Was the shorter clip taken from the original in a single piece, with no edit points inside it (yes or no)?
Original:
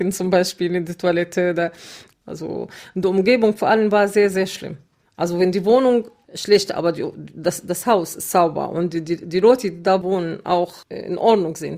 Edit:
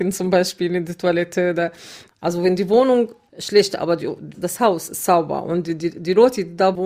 no